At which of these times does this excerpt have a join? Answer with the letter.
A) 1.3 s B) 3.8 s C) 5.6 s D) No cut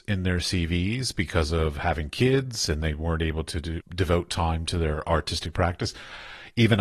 B